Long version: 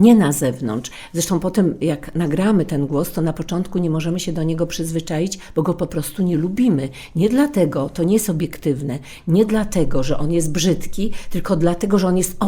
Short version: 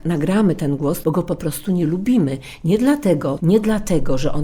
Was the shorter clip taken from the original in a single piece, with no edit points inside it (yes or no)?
no